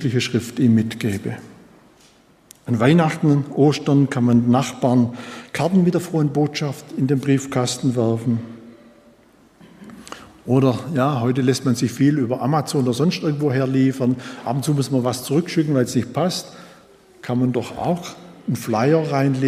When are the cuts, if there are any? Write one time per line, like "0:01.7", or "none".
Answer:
none